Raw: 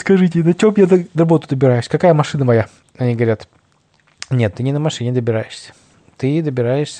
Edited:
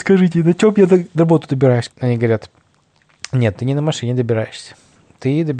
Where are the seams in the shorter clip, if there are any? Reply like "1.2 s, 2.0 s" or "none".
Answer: 1.9 s